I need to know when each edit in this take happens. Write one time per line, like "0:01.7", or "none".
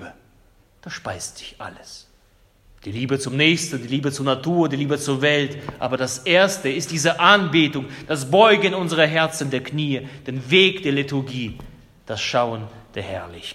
none